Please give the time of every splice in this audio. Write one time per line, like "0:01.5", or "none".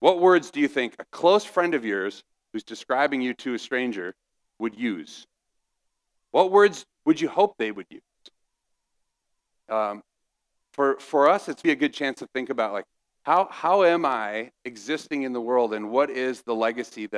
0:11.6